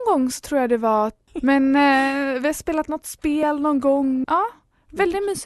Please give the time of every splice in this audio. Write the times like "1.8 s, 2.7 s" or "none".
1.3 s, 4.2 s